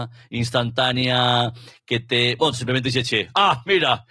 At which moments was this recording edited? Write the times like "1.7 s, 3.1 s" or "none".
2.5 s